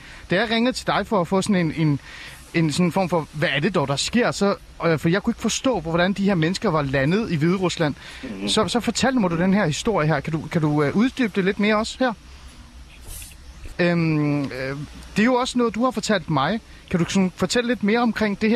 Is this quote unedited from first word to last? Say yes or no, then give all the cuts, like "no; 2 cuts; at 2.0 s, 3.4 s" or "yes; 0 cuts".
no; 1 cut; at 13.7 s